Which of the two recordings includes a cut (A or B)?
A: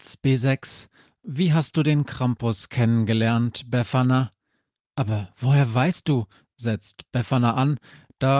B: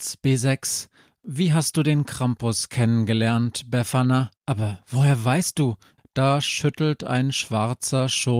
B